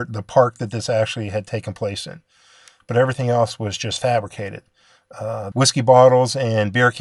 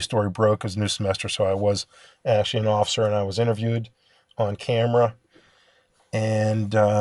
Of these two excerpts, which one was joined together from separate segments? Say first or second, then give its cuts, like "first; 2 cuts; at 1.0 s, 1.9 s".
first; 1 cut; at 5.5 s